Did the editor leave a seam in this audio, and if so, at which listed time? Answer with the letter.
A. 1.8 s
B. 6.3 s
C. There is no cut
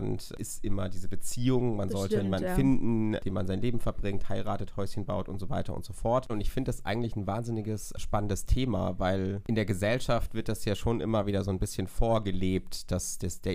B